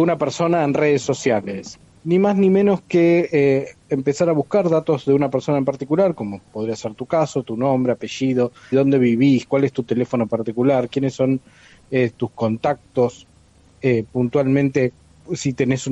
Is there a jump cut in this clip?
yes; 2 cuts; at 1.9 s, 8.7 s

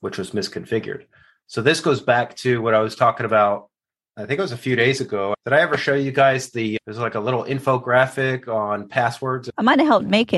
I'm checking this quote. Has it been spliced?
no; 0 cuts

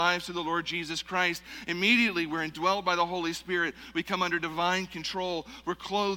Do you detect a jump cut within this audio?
no; 0 cuts

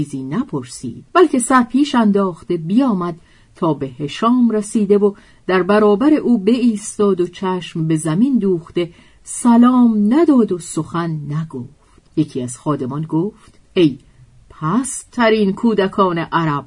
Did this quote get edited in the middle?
yes; 3 cuts; at 1.1 s, 12.1 s, 13.6 s

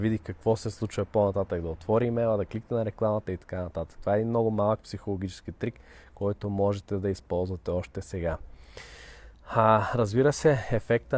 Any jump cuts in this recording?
no; 0 cuts

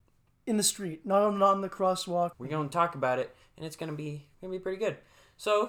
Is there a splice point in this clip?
yes; 2 cuts; at 2.3 s, 4.3 s

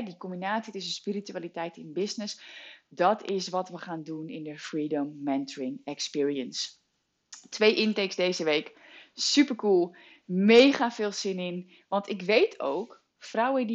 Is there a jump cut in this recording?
no; 0 cuts

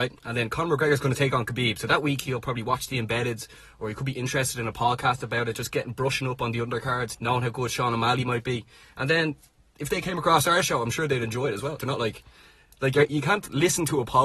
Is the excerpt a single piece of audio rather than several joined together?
no; 2 cuts; at 7.1 s, 11.8 s

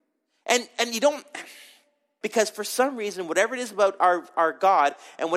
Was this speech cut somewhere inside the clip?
yes; 1 cut; at 2.2 s

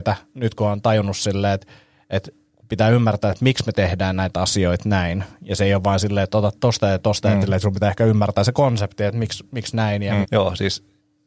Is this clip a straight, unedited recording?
no; 2 cuts; at 7.4 s, 10.2 s

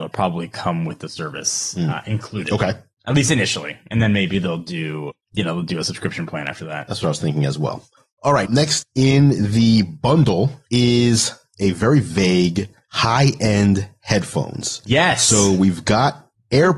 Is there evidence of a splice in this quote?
yes; 1 cut; at 8.5 s

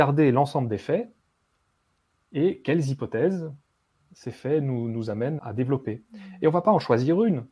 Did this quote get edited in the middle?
yes; 1 cut; at 5.4 s

